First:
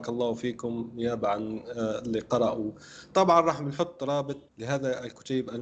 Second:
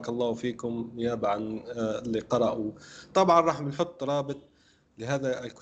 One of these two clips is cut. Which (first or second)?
first